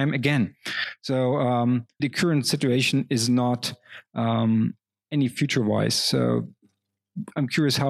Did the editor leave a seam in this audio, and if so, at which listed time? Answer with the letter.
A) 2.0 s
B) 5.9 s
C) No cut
A